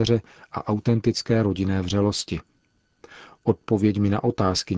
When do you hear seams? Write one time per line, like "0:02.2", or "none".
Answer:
none

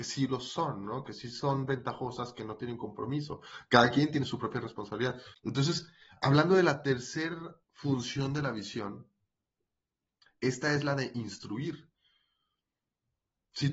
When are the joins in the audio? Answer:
0:05.3
0:07.6

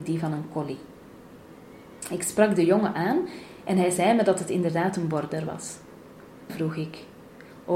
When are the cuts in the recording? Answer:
0:06.5

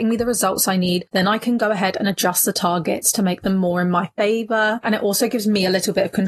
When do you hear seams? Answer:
0:04.8

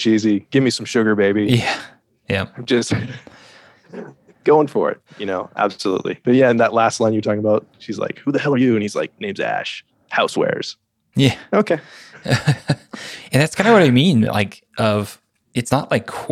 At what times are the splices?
none

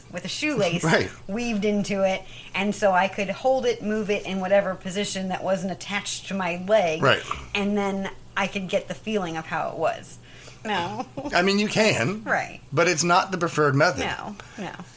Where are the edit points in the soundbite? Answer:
0:10.6

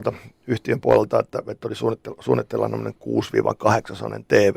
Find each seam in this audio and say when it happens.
none

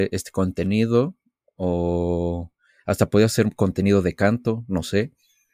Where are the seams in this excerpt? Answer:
none

